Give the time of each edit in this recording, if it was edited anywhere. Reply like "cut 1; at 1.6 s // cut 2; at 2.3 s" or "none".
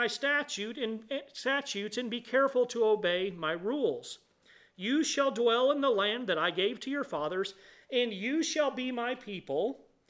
none